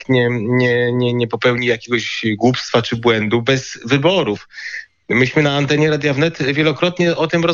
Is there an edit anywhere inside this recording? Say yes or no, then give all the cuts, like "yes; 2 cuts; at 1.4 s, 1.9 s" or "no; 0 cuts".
no; 0 cuts